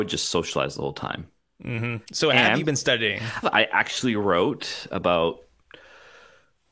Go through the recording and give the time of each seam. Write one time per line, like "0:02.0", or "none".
0:02.1
0:03.4